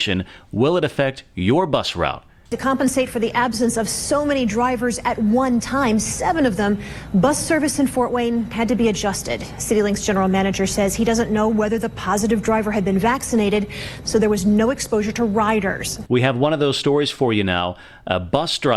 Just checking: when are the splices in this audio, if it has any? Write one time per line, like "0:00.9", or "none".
0:02.5
0:14.0
0:16.0